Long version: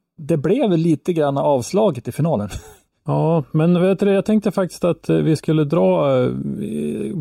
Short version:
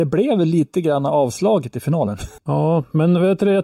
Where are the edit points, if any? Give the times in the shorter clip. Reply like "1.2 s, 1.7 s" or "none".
2.4 s